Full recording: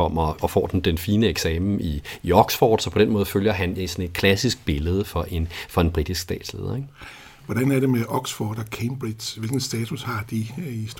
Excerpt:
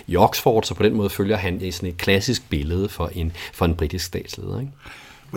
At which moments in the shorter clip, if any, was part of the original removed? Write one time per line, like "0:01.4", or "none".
none